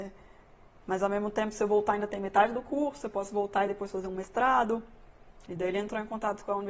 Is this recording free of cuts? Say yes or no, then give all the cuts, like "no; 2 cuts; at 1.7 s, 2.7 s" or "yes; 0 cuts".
no; 1 cut; at 5.5 s